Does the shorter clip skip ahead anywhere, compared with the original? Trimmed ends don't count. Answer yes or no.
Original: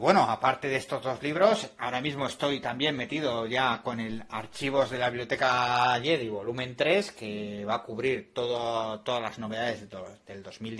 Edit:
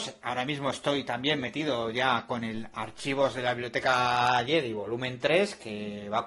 no